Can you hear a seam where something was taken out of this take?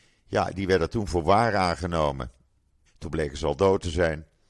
yes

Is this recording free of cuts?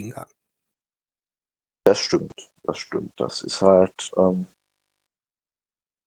no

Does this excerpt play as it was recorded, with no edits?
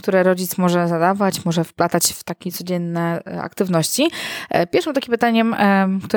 yes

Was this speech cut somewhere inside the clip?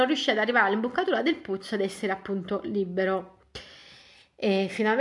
no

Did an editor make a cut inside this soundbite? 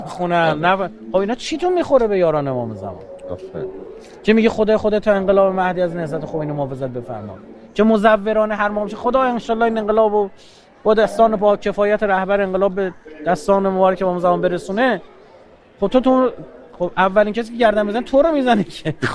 no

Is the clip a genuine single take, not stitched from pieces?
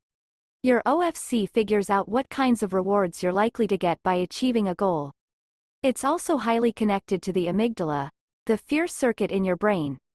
yes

